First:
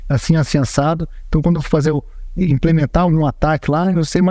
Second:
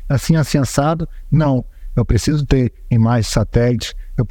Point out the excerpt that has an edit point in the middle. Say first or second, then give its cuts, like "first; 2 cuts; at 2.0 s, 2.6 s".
second; 1 cut; at 1.2 s